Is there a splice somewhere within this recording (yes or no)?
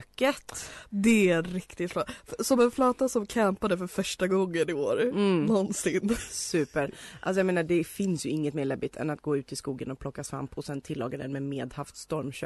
yes